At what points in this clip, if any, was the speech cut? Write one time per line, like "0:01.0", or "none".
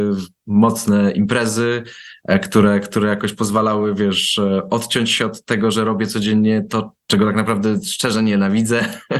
0:07.0